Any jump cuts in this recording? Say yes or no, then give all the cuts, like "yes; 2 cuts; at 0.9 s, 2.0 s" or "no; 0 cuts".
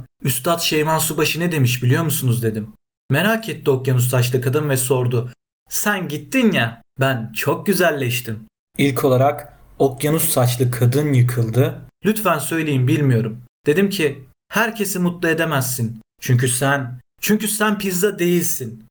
yes; 3 cuts; at 5.5 s, 8.7 s, 11.9 s